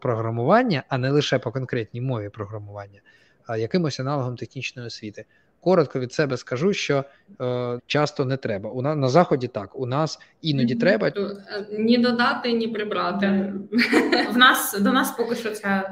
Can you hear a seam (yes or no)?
yes